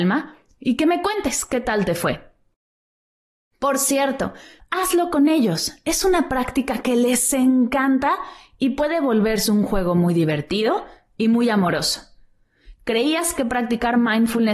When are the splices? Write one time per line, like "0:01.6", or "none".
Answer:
0:04.6

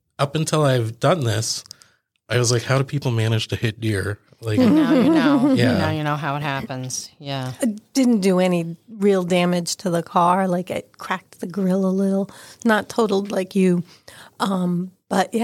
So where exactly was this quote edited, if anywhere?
0:07.6

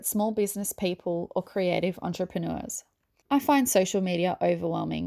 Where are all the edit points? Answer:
0:03.2

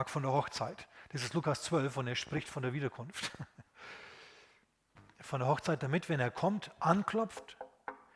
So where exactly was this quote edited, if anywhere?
none

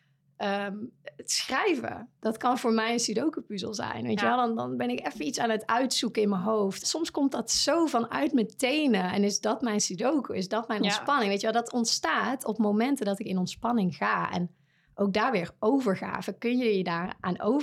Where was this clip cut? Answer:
0:06.8

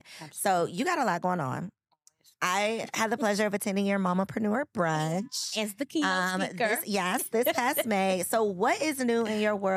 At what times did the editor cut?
none

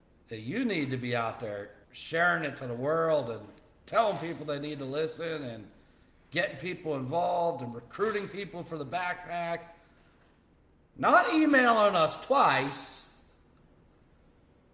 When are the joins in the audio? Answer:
0:01.8

